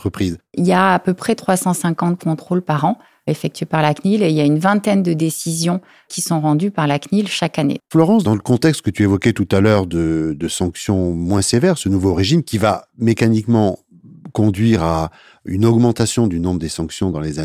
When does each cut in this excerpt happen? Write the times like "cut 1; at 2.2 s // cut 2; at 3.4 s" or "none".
cut 1; at 7.8 s